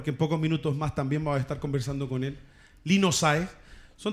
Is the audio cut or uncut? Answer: uncut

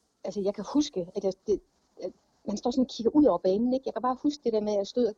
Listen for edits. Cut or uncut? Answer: uncut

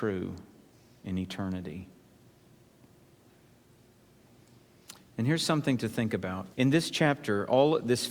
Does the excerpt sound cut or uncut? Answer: cut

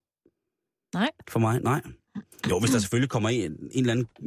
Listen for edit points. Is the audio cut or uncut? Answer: uncut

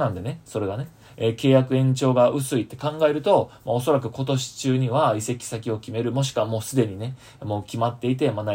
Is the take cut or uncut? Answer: uncut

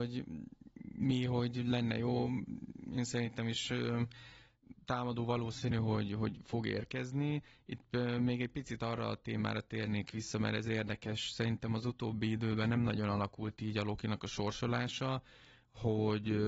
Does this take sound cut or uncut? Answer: uncut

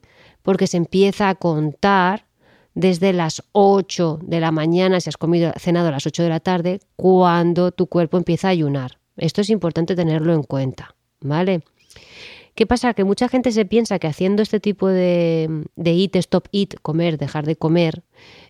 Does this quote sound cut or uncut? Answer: uncut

